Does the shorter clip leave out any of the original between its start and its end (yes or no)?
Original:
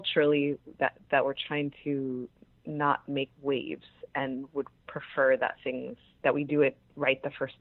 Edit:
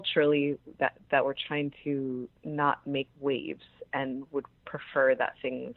yes